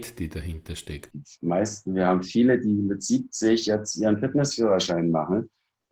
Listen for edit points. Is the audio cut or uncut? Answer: cut